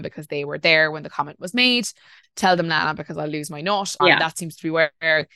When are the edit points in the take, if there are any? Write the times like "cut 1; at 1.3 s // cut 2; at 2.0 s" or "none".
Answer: cut 1; at 2.2 s // cut 2; at 4.0 s